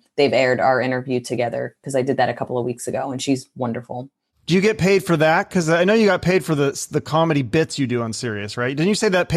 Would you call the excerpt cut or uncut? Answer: uncut